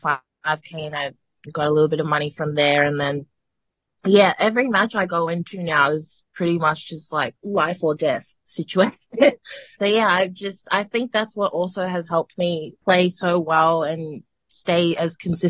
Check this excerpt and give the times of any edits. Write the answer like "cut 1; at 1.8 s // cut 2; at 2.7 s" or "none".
none